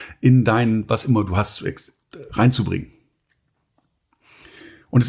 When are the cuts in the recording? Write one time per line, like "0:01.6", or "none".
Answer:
none